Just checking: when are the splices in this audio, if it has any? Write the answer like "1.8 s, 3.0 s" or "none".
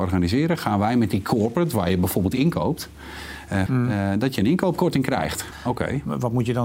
3.7 s, 5.5 s